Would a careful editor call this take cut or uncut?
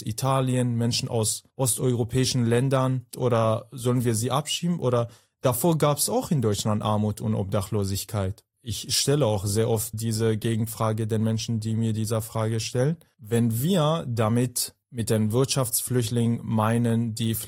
cut